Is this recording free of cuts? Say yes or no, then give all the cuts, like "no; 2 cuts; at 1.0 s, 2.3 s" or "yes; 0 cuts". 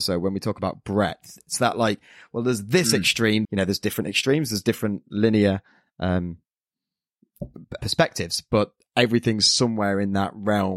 no; 2 cuts; at 3.4 s, 7.8 s